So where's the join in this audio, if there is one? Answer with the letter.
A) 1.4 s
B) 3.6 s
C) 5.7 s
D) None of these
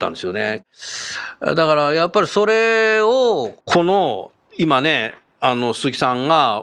B